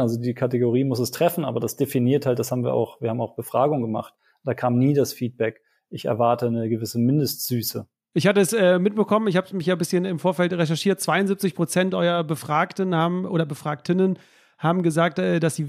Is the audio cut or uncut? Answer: uncut